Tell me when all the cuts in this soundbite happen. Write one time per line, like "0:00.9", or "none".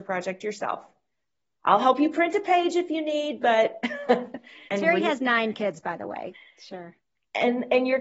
0:04.7
0:06.3